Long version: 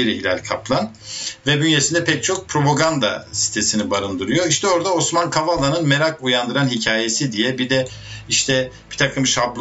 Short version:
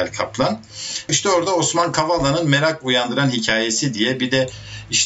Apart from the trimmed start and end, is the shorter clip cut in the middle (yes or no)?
yes